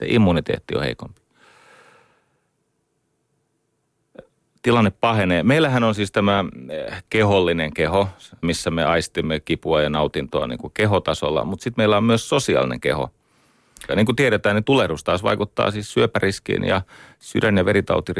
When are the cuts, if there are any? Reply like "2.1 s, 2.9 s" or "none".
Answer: 8.4 s, 13.9 s